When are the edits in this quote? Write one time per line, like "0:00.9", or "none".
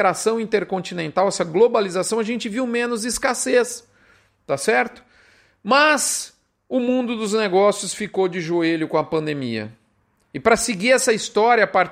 none

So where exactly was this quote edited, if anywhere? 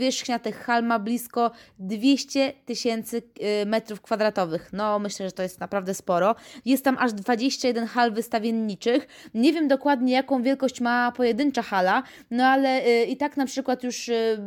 none

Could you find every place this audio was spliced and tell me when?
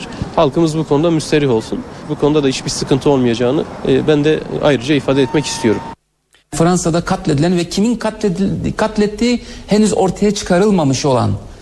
0:02.1
0:06.4

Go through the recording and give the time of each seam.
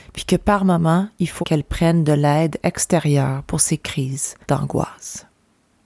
0:01.4
0:04.4

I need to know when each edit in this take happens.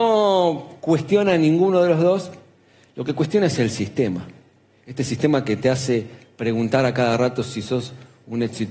none

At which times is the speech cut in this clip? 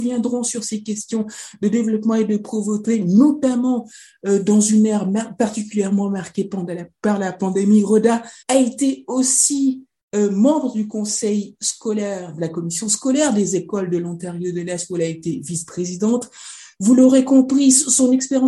0:08.4

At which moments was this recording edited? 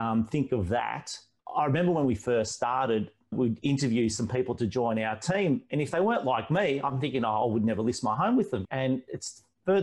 0:01.4
0:08.6

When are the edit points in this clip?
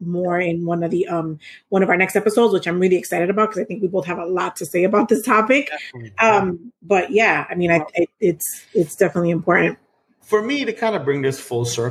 none

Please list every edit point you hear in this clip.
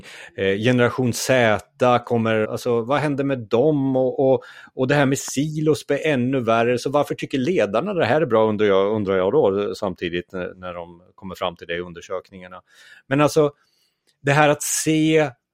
0:02.4
0:10.5

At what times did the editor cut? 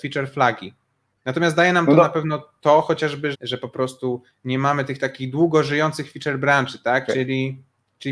0:01.1
0:03.3
0:07.1

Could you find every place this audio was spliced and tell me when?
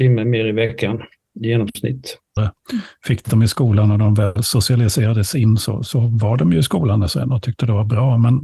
0:02.4

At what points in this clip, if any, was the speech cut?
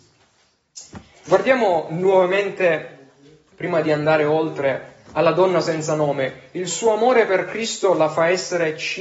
0:01.2

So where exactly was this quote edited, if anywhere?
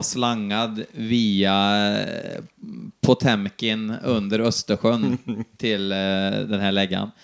none

